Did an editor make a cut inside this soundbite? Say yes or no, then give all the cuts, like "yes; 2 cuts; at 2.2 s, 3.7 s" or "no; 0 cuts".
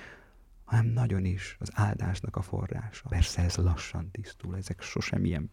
yes; 1 cut; at 3.1 s